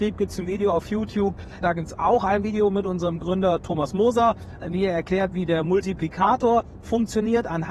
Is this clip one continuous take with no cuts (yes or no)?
no